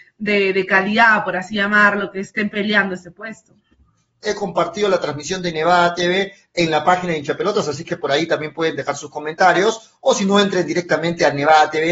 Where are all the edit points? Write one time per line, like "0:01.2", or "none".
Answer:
0:04.2